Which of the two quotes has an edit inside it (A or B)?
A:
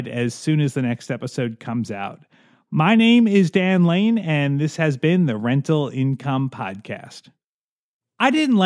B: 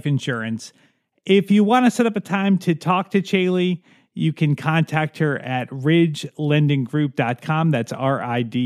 B